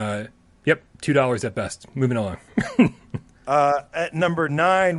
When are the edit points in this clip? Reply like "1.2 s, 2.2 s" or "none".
none